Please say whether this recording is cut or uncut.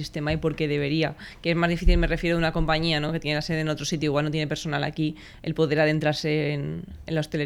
uncut